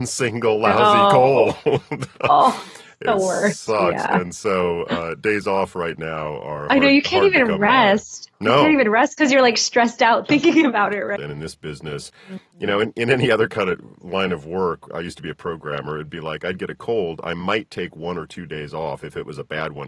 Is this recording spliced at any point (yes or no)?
yes